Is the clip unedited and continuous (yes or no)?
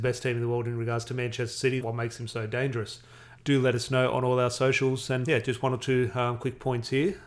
no